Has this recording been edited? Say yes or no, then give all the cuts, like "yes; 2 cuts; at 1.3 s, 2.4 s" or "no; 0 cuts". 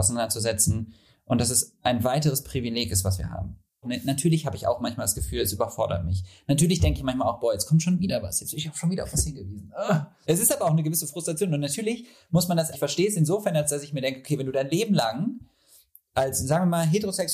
yes; 3 cuts; at 3.8 s, 10.2 s, 12.7 s